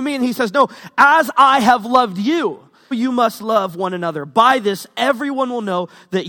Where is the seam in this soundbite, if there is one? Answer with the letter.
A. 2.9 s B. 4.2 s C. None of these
A